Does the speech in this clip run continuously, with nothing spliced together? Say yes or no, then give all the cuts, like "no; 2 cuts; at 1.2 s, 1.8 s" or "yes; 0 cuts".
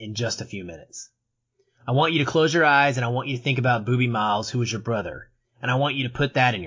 no; 1 cut; at 5.4 s